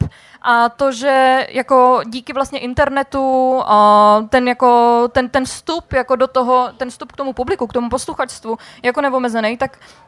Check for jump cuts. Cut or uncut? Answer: uncut